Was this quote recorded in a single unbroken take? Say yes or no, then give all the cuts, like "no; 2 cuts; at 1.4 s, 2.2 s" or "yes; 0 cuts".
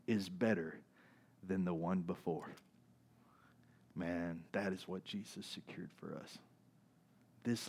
no; 1 cut; at 4.5 s